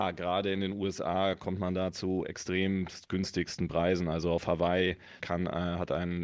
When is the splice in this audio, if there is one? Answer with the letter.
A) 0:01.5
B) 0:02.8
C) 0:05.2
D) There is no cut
C